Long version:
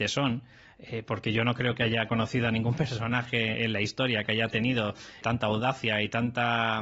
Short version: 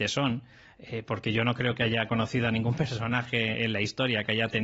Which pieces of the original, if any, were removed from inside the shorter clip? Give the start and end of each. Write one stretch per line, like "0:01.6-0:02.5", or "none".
none